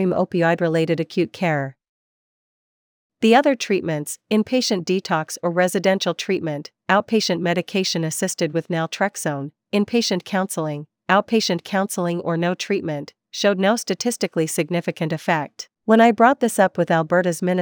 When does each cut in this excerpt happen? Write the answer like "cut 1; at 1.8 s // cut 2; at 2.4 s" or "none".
cut 1; at 15.7 s